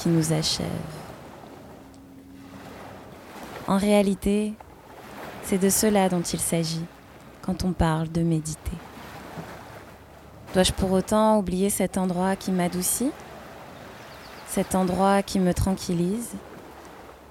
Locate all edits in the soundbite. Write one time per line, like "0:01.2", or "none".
0:03.7
0:10.5